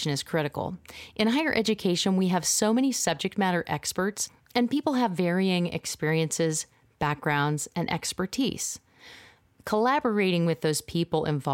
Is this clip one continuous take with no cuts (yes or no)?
yes